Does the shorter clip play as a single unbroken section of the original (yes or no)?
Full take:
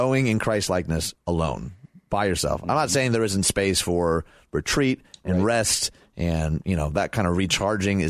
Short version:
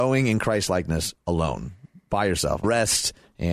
no